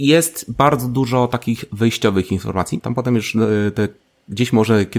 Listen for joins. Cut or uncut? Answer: cut